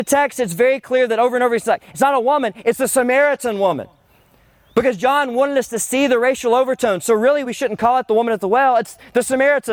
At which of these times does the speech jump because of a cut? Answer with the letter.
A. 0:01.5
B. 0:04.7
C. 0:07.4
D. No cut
D